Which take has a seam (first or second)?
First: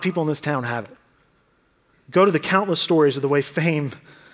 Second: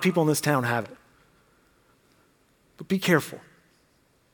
first